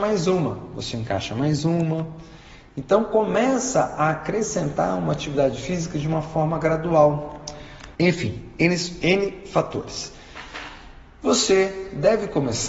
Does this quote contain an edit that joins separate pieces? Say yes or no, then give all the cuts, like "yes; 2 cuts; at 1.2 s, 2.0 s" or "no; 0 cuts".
yes; 1 cut; at 8.0 s